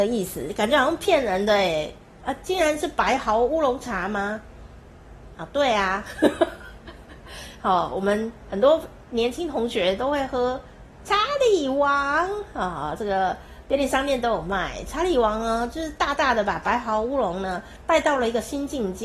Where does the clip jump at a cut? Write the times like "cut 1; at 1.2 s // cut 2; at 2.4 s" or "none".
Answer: cut 1; at 5.3 s